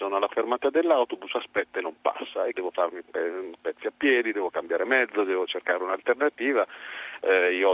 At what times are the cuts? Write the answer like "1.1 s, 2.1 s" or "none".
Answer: 2.5 s